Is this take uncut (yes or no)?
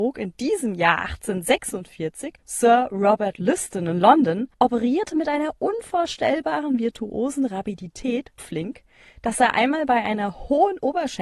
no